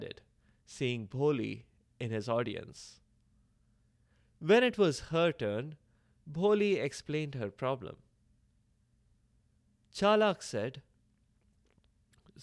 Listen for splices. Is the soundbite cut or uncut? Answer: uncut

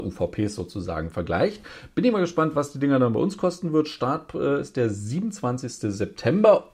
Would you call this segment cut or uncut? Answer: uncut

